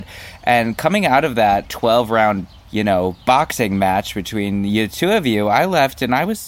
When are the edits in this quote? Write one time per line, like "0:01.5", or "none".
none